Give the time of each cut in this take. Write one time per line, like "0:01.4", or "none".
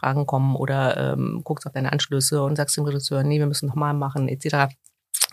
none